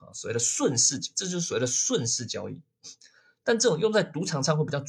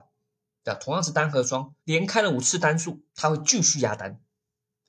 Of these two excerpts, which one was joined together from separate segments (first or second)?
second